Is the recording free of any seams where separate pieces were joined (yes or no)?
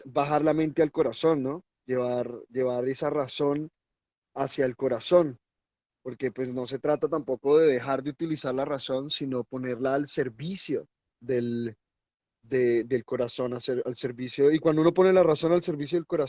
yes